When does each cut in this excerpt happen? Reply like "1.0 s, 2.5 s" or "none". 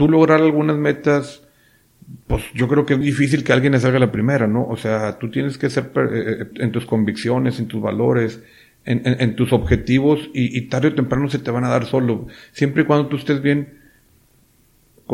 3.0 s, 6.5 s